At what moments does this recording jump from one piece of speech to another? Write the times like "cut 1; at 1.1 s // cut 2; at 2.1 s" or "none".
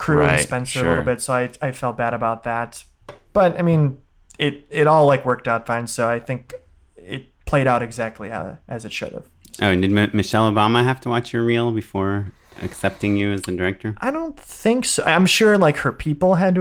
none